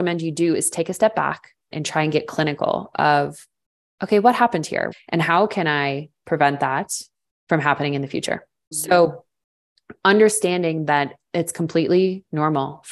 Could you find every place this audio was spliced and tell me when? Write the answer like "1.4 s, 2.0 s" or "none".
1.7 s, 4.9 s, 8.7 s